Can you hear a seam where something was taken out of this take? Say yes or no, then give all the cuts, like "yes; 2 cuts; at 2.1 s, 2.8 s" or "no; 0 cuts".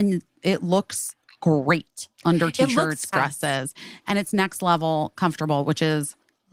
yes; 1 cut; at 3.1 s